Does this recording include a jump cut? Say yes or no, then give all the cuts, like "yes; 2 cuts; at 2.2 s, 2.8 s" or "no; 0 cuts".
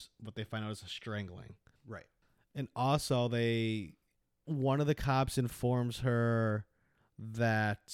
no; 0 cuts